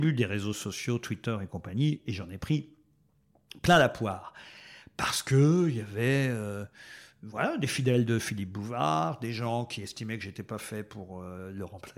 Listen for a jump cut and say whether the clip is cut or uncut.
uncut